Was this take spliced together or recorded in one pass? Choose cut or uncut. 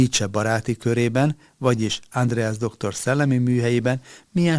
uncut